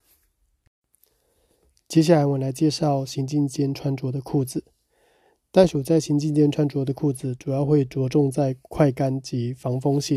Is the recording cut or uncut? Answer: uncut